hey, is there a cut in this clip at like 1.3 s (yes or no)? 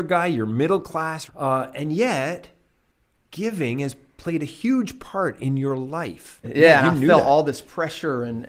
yes